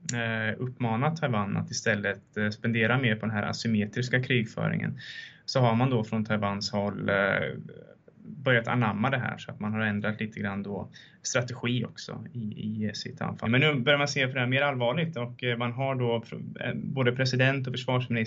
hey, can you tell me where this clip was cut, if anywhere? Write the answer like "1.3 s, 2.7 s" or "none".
13.4 s